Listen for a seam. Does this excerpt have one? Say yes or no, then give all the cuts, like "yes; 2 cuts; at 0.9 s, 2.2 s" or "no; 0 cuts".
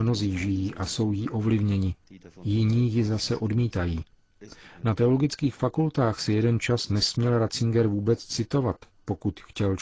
no; 0 cuts